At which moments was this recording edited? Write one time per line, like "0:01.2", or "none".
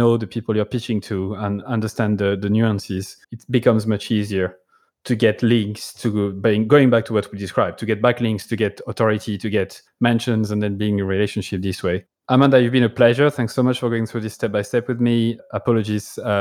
0:01.6
0:03.2